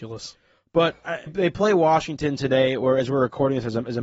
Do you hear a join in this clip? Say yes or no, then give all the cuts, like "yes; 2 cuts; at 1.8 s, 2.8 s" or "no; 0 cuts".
yes; 1 cut; at 1.3 s